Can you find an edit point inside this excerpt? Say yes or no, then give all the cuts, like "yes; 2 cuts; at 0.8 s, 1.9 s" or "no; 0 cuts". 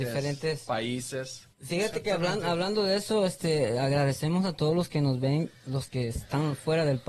yes; 1 cut; at 1.5 s